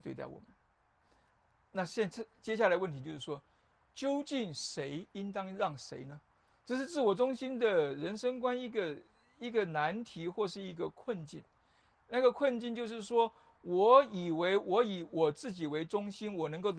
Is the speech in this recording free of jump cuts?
yes; 0 cuts

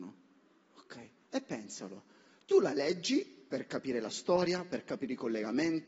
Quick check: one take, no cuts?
yes; 0 cuts

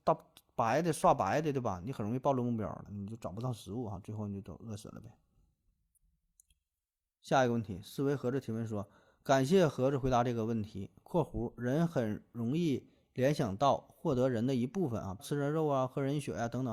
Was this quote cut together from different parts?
yes; 2 cuts; at 2.9 s, 15.2 s

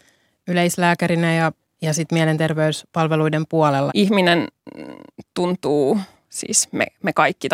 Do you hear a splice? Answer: yes; 1 cut; at 3.9 s

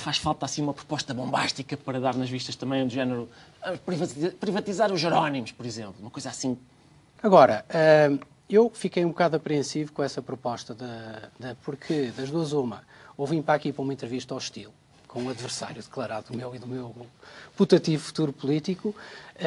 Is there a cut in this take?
yes; 2 cuts; at 7.2 s, 11.6 s

